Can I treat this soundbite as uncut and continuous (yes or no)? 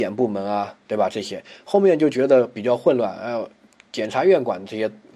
yes